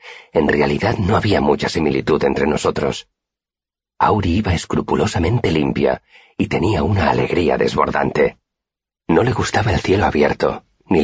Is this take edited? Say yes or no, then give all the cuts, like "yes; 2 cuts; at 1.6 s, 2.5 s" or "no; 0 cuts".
no; 0 cuts